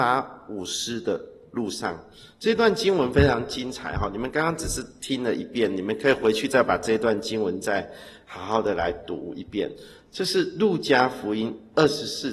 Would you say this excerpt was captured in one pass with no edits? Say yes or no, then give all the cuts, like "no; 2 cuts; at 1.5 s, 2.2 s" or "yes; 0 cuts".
yes; 0 cuts